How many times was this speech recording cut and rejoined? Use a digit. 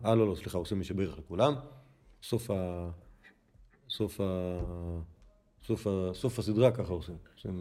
0